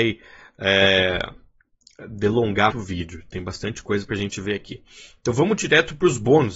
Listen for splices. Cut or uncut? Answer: cut